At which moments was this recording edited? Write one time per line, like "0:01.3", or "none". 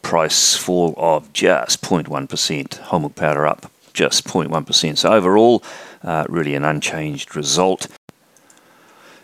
none